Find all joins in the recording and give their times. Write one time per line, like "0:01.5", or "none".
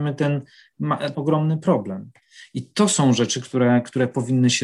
0:01.1